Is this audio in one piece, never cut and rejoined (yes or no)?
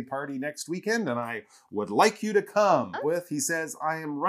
no